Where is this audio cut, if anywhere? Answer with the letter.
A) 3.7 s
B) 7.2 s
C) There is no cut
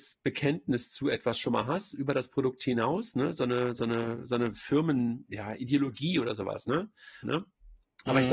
B